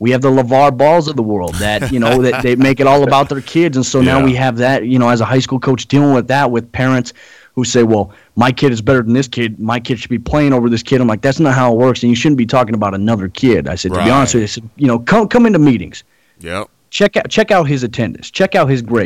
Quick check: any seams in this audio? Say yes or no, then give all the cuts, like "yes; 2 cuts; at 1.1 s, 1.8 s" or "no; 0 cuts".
no; 0 cuts